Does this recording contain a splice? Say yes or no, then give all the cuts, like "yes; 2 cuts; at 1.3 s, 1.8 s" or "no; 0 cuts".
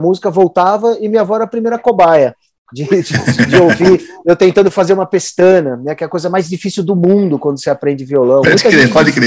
no; 0 cuts